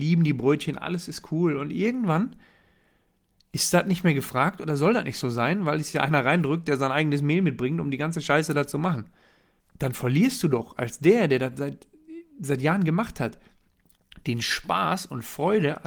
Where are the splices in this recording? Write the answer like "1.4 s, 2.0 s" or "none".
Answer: none